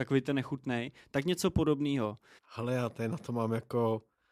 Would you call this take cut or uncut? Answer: cut